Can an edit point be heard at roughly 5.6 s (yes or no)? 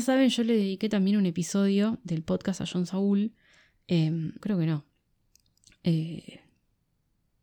no